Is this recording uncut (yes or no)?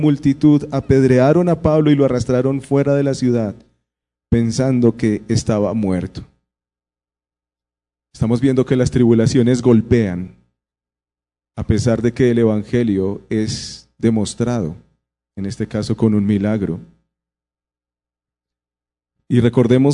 yes